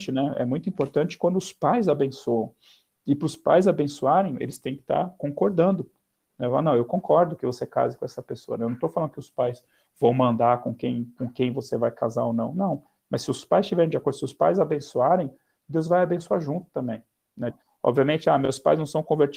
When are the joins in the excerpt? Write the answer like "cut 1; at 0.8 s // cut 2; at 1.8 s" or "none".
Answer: cut 1; at 17.5 s